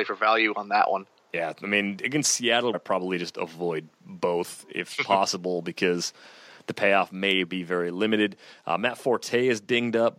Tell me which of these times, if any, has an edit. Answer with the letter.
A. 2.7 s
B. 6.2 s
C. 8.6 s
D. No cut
A